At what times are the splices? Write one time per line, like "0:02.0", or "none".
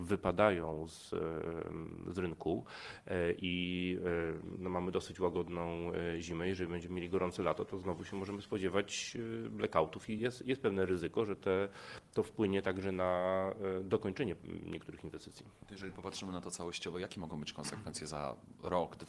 none